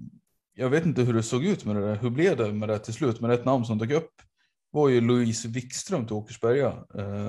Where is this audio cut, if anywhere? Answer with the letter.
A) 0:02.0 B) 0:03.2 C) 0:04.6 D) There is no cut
D